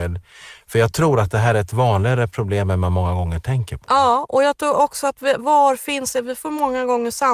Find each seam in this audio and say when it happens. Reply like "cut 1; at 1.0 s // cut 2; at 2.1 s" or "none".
cut 1; at 5.4 s